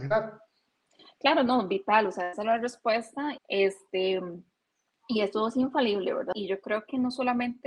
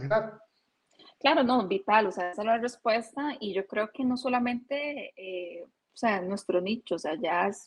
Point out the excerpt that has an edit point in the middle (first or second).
first